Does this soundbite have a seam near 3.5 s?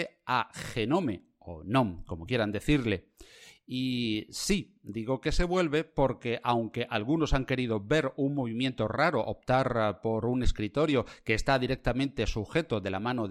no; 0 cuts

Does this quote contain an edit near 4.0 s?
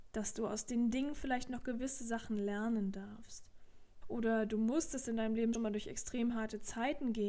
yes; 2 cuts; at 4.0 s, 5.5 s

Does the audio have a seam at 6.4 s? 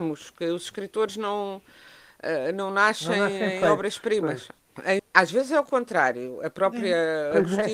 no; 1 cut; at 5.0 s

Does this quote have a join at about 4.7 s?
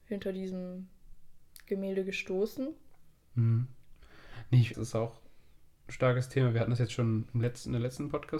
yes; 1 cut; at 4.7 s

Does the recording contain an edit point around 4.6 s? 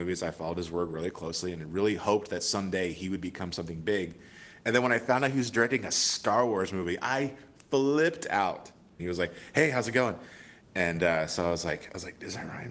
no; 2 cuts; at 9.0 s, 10.6 s

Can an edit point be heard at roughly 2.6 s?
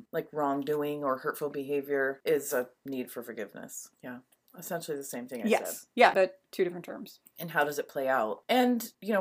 no; 2 cuts; at 3.9 s, 6.1 s

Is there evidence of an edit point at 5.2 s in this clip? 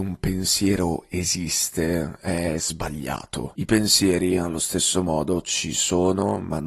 no; 1 cut; at 3.5 s

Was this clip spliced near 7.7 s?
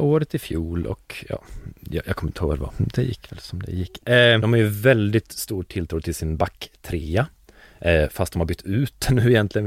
no; 2 cuts; at 2.7 s, 4.4 s

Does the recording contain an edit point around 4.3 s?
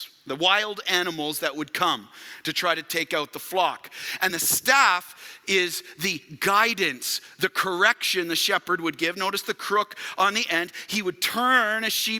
yes; 1 cut; at 4.3 s

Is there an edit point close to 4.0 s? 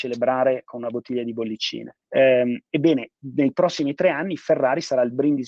no; 1 cut; at 2.0 s

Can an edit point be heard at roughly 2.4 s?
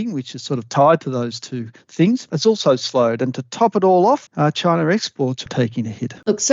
no; 2 cuts; at 4.3 s, 5.5 s

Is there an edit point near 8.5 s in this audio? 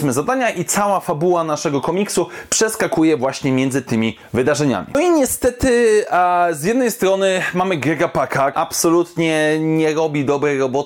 yes; 1 cut; at 8.5 s

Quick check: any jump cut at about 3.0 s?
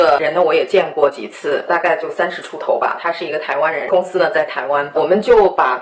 no; 1 cut; at 1.7 s

